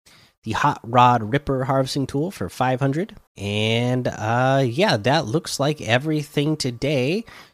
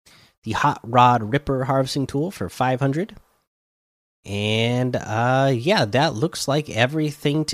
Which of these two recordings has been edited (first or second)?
first